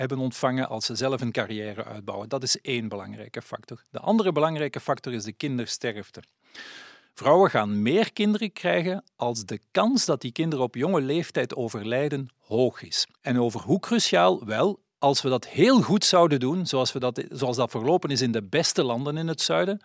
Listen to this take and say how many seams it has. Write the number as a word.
one